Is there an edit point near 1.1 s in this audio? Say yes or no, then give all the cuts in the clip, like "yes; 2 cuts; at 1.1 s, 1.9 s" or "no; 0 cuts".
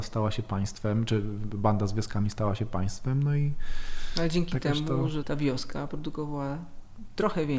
no; 1 cut; at 5.2 s